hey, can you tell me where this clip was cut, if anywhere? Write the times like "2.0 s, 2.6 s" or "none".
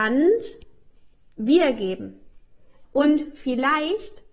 2.8 s